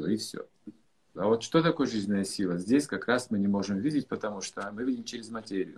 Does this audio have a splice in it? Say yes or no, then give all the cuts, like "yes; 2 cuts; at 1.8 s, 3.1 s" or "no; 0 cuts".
yes; 1 cut; at 1.2 s